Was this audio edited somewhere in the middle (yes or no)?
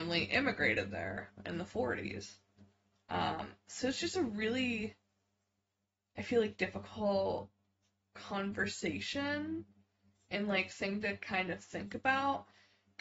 no